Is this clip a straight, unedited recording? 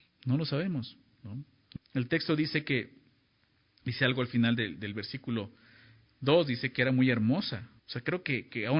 no; 2 cuts; at 1.8 s, 7.8 s

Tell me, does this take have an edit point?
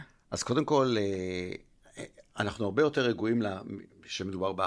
no; 0 cuts

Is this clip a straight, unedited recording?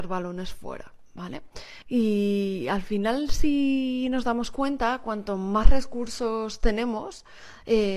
no; 1 cut; at 1.8 s

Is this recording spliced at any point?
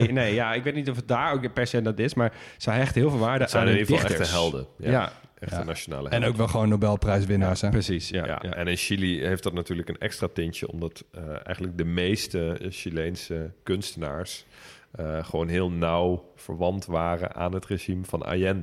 no; 0 cuts

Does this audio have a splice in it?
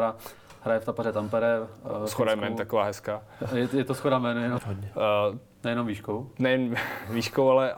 yes; 1 cut; at 4.6 s

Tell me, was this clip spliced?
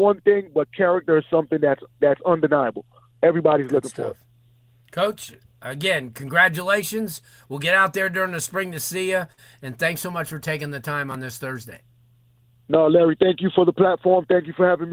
no; 0 cuts

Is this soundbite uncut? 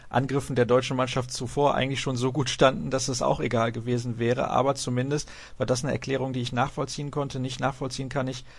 yes; 0 cuts

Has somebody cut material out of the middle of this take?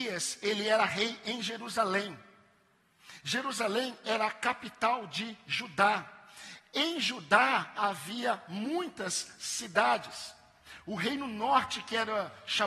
no; 0 cuts

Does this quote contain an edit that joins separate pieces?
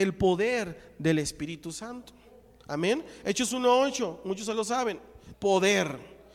yes; 1 cut; at 5.3 s

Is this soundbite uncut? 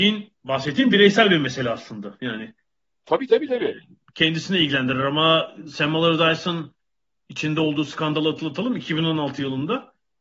yes; 0 cuts

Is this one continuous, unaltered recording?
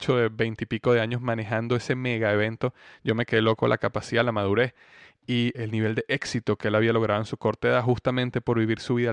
no; 1 cut; at 5.5 s

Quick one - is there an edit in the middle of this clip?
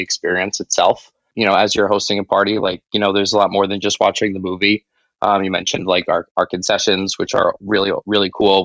no; 0 cuts

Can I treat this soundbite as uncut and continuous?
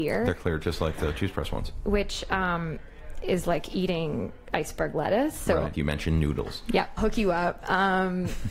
no; 2 cuts; at 5.7 s, 7.0 s

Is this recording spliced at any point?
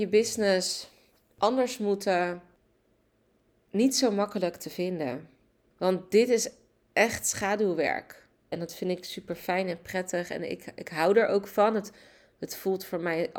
yes; 1 cut; at 8.5 s

